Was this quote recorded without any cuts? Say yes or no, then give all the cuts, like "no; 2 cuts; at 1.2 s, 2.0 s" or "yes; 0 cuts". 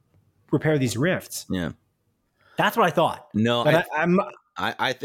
no; 1 cut; at 3.6 s